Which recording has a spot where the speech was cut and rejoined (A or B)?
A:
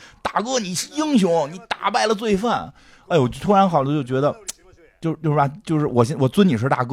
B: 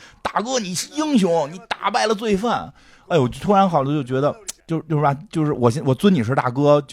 B